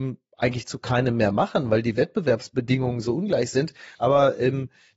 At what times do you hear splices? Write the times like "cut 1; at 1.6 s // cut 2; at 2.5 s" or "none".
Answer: cut 1; at 4.0 s